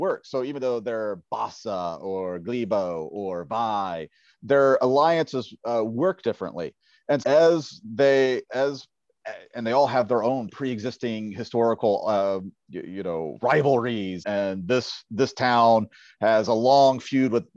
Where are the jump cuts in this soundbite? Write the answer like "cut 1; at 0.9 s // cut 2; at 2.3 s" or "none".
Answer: cut 1; at 7.2 s // cut 2; at 14.2 s